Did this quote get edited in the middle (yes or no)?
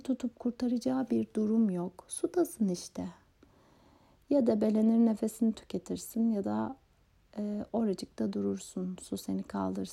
no